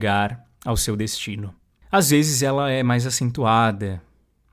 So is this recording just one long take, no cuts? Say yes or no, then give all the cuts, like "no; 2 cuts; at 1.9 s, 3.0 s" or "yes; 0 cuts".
no; 1 cut; at 1.8 s